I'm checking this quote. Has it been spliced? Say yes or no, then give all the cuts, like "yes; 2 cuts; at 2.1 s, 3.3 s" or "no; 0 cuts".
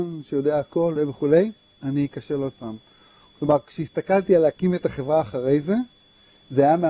yes; 1 cut; at 1.0 s